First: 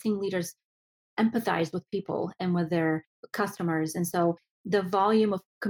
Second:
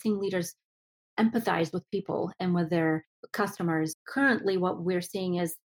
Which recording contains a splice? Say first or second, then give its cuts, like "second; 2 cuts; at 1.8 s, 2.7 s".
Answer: second; 1 cut; at 3.9 s